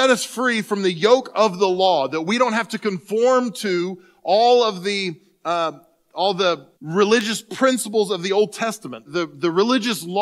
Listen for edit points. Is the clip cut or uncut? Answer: cut